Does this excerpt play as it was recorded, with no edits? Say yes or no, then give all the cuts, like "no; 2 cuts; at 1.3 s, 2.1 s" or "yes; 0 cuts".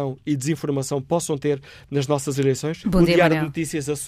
no; 1 cut; at 2.8 s